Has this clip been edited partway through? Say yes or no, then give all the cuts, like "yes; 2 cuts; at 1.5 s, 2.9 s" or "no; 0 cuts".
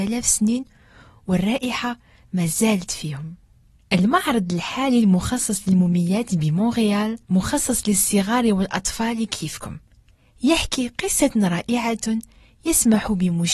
yes; 1 cut; at 7.2 s